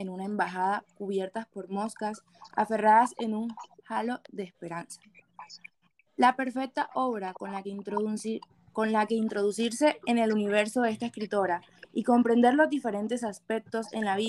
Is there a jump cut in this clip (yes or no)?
no